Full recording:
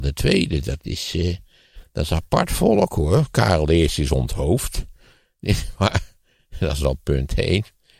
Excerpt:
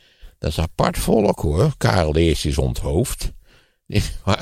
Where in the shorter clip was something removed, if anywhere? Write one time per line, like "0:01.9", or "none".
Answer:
none